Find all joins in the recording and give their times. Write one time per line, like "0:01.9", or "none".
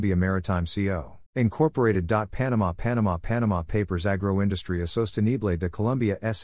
0:01.3